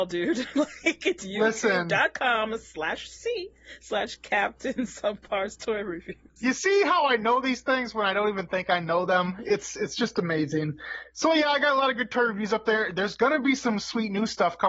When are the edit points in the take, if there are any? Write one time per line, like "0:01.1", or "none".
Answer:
none